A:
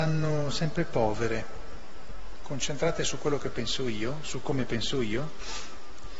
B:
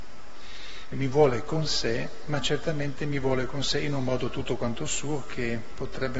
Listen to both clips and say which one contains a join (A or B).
B